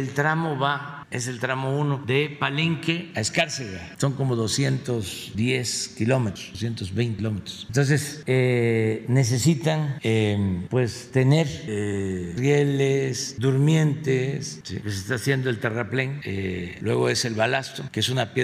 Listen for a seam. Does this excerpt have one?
no; 0 cuts

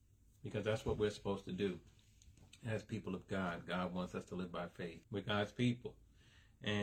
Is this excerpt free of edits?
no; 1 cut; at 5.0 s

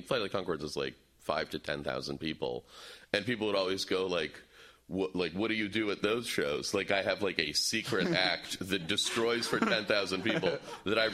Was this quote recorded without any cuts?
yes; 0 cuts

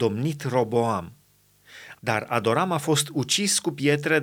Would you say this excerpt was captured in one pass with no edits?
no; 1 cut; at 1.9 s

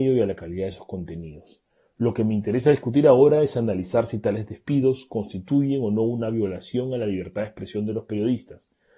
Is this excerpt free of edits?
yes; 0 cuts

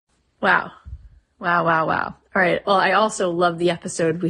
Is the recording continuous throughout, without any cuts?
yes; 0 cuts

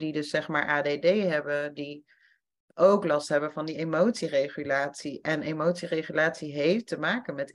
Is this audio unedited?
yes; 0 cuts

